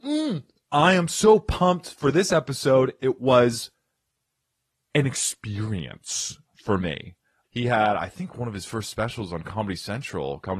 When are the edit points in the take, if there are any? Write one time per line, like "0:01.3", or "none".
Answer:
0:07.4